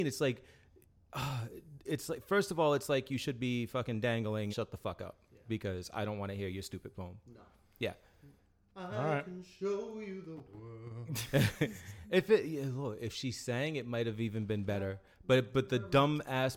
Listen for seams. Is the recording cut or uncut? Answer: cut